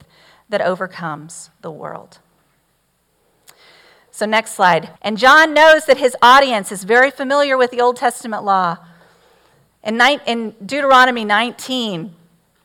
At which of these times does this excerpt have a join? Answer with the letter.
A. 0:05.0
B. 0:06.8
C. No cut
A